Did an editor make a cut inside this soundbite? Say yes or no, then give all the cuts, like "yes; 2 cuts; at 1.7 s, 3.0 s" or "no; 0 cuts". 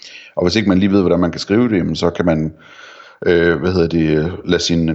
no; 0 cuts